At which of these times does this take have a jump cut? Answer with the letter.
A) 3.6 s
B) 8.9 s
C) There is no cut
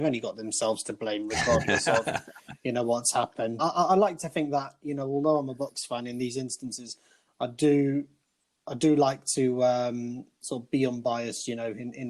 A